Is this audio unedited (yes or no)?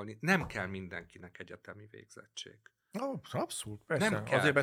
yes